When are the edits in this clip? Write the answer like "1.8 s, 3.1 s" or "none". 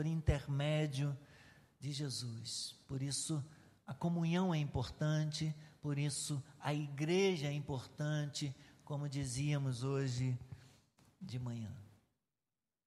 none